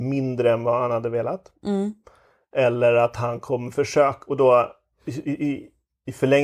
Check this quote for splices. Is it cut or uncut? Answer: uncut